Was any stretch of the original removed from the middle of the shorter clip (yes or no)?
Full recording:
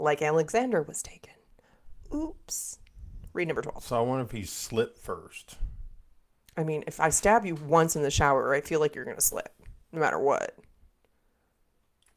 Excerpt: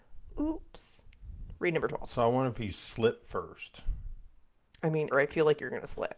yes